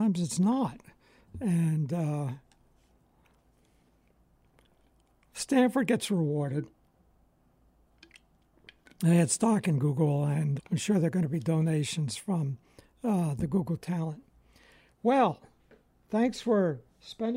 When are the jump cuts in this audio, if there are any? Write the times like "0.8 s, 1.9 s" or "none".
10.6 s